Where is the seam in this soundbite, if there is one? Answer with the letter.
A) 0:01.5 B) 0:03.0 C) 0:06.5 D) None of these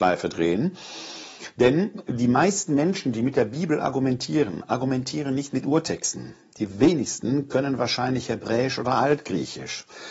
D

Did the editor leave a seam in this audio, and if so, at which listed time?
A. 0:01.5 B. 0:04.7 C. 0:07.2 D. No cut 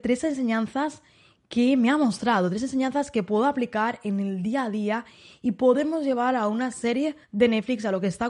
C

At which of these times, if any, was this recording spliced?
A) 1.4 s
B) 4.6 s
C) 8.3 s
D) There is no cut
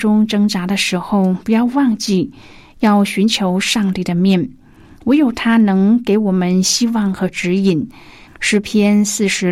C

